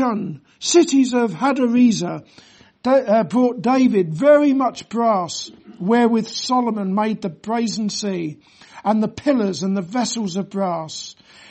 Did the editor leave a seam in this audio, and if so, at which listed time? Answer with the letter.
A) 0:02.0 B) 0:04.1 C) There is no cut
C